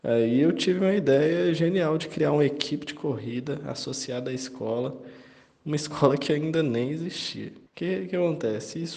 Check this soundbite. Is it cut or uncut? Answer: cut